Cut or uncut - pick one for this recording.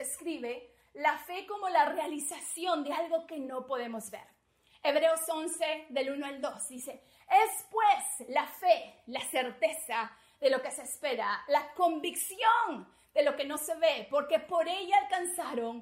uncut